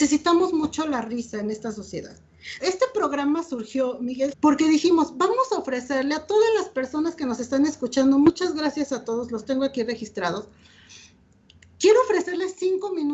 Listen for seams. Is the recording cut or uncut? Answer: cut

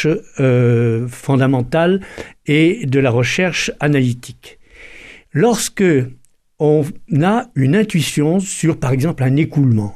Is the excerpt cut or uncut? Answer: cut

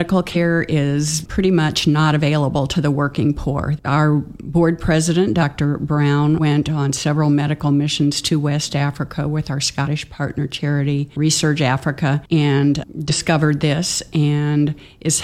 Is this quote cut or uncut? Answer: cut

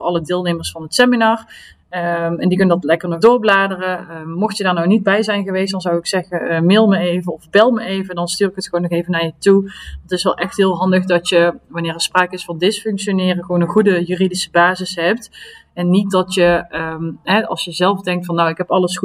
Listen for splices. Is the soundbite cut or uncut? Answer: cut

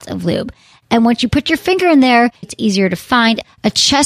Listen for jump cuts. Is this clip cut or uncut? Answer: cut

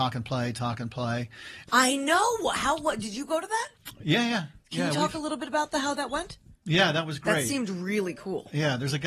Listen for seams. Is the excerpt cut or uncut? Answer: cut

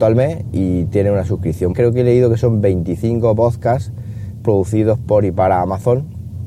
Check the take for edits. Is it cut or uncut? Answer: cut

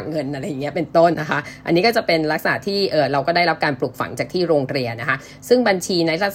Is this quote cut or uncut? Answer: cut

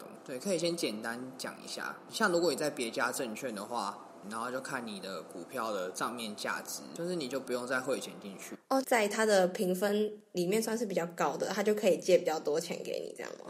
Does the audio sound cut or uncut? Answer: cut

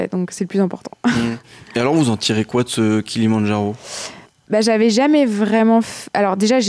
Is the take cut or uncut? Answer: uncut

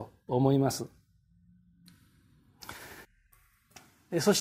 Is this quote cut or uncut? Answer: cut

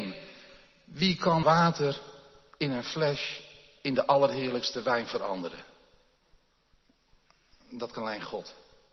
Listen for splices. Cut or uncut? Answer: cut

